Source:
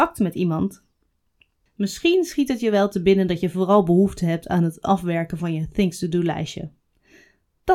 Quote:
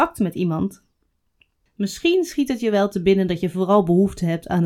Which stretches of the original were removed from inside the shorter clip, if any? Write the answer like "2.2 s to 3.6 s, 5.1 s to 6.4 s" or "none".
none